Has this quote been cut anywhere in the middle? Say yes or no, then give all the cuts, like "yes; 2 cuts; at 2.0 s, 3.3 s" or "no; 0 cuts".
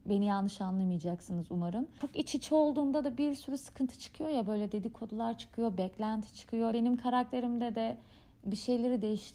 yes; 1 cut; at 6.7 s